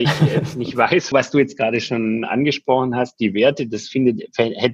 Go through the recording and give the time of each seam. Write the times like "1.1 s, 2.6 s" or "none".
1.1 s